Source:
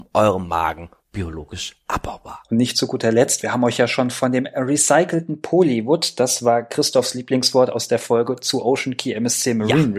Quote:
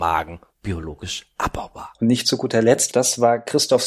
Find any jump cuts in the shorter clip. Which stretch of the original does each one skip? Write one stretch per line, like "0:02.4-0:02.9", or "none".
0:03.4-0:06.2